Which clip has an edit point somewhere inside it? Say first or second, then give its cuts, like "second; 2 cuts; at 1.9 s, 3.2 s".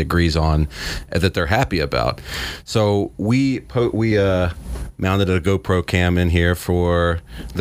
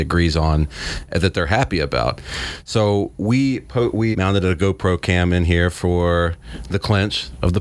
second; 1 cut; at 4.1 s